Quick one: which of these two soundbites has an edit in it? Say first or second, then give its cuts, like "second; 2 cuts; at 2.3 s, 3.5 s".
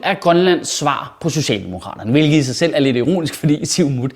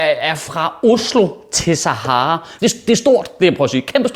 second; 1 cut; at 2.6 s